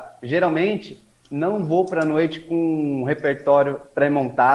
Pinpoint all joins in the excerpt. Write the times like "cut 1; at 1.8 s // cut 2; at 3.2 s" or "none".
none